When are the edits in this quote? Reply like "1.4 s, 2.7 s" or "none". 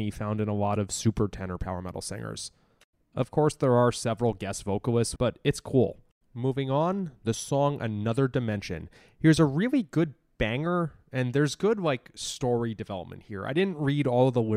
5.2 s